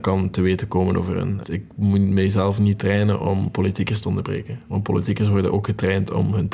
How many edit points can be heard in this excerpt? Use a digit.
1